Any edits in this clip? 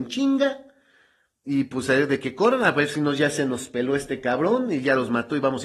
no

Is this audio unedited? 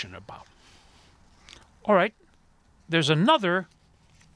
yes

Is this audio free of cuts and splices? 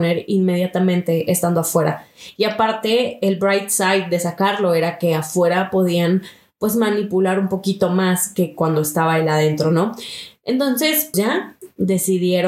no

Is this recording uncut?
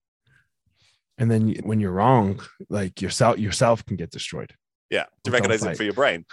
no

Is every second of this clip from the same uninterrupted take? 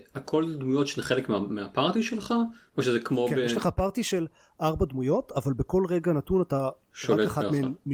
yes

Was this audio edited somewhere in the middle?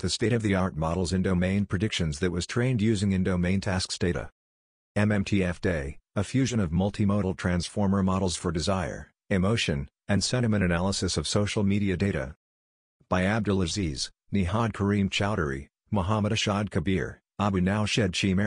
no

